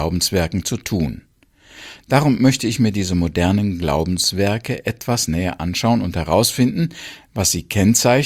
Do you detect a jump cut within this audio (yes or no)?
no